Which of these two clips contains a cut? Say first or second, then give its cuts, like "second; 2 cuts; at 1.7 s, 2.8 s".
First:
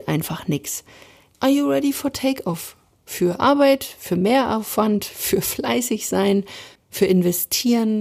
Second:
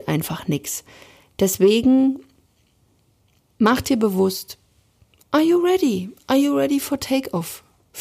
first; 2 cuts; at 1.3 s, 6.8 s